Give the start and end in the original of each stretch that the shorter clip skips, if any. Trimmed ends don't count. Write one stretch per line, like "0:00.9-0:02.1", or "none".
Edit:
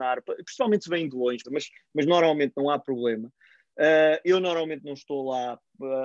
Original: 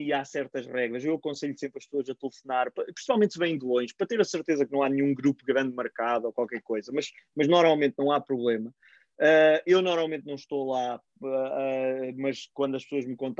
0:03.9-0:06.9